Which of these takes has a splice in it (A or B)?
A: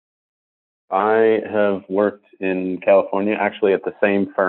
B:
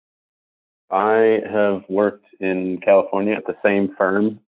B